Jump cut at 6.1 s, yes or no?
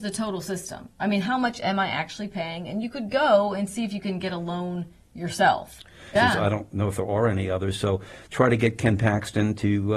yes